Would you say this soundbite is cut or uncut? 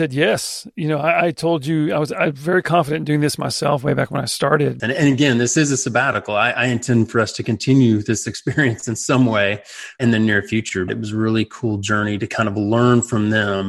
cut